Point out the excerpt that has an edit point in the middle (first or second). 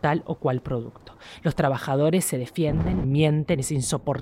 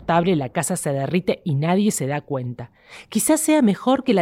first